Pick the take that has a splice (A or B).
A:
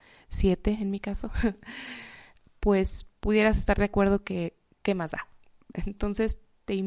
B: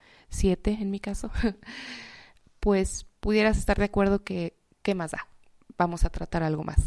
A